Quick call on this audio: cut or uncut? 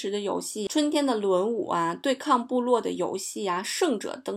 uncut